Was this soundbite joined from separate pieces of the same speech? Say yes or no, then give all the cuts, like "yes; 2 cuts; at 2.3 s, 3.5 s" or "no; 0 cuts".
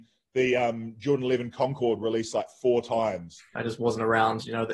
yes; 1 cut; at 3.6 s